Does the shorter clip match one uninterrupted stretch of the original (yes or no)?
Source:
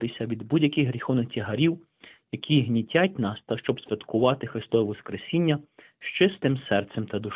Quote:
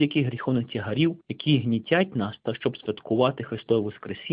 no